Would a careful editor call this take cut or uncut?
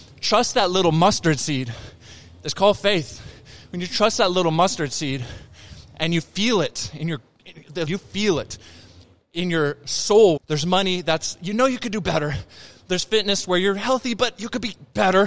cut